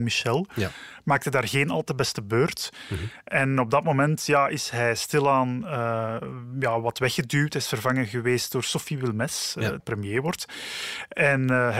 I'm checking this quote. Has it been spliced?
yes; 1 cut; at 9.8 s

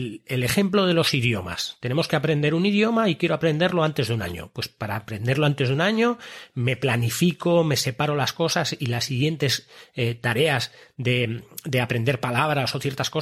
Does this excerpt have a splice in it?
no; 0 cuts

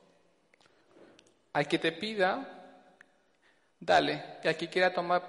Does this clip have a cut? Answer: no; 0 cuts

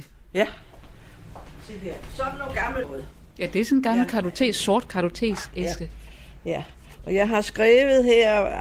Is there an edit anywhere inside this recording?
yes; 1 cut; at 2.8 s

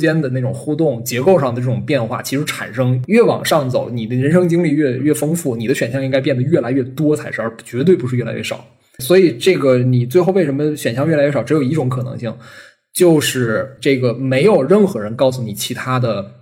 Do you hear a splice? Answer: no; 0 cuts

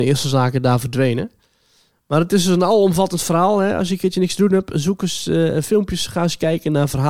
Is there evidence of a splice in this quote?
no; 0 cuts

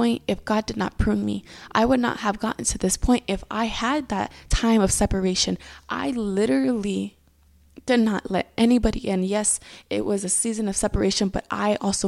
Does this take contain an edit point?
no; 0 cuts

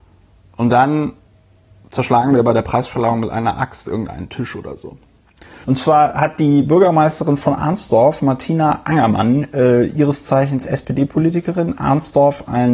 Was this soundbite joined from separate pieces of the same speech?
yes; 1 cut; at 5.6 s

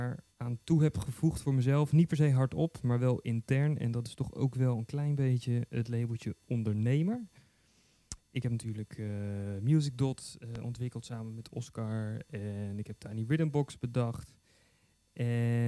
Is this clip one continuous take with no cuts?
yes; 0 cuts

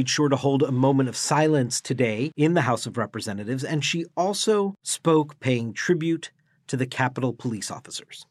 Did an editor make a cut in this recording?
no; 0 cuts

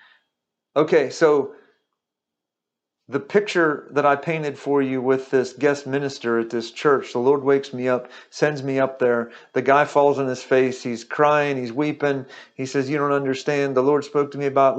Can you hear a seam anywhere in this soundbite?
no; 0 cuts

